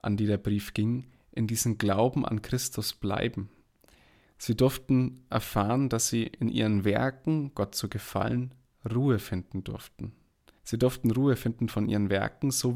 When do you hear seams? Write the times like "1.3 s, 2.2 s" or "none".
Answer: 10.6 s